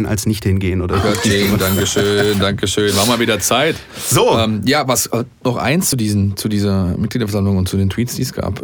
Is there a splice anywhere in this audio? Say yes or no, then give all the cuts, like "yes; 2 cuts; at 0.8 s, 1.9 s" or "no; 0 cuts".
no; 0 cuts